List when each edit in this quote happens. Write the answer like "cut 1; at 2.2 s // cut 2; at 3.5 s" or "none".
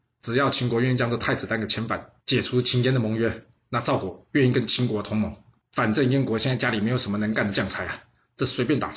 cut 1; at 5.6 s